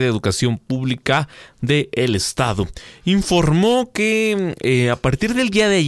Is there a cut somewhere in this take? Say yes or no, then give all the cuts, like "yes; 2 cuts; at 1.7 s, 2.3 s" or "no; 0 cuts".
no; 0 cuts